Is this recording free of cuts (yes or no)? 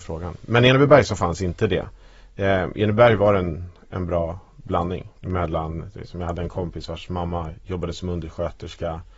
no